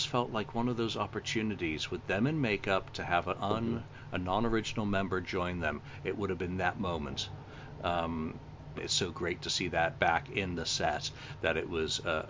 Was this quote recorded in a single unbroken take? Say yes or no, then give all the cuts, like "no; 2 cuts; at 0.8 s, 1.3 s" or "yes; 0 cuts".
no; 1 cut; at 8.8 s